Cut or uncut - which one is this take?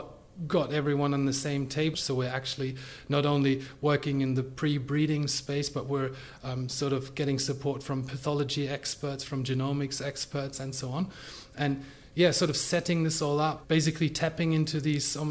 cut